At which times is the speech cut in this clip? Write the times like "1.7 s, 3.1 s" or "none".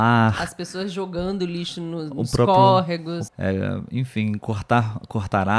3.3 s